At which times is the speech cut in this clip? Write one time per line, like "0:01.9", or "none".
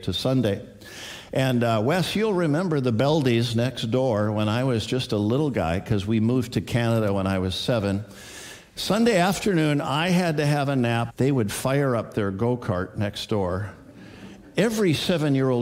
0:11.1